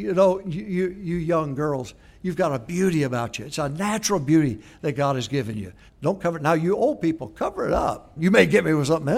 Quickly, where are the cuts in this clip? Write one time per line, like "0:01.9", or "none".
0:05.9
0:08.2